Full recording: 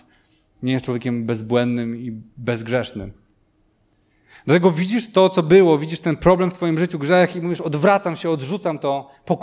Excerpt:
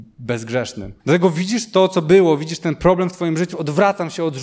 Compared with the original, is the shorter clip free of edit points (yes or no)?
no